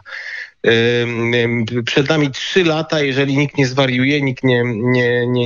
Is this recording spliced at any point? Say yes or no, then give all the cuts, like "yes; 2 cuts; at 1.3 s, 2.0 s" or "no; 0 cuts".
no; 0 cuts